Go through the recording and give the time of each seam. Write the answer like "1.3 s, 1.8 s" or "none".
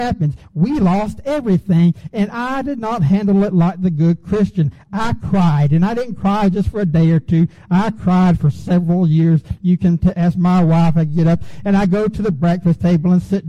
none